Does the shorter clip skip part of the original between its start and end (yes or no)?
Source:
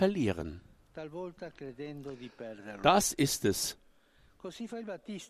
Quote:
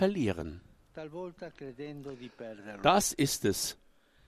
no